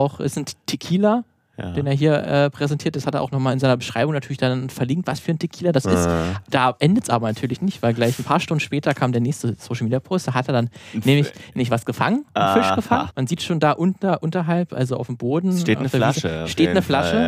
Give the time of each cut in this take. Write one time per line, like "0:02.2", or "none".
0:13.1